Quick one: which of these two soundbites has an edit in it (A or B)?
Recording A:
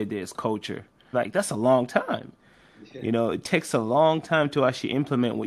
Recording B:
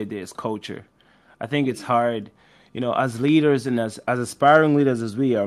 A